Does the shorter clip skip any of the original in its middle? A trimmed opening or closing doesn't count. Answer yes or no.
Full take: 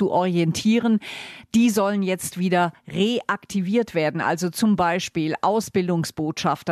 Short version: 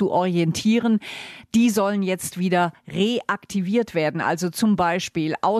no